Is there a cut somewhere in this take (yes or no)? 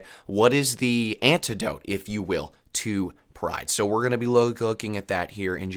no